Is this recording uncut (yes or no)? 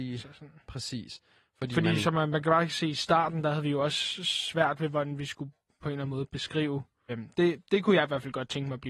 no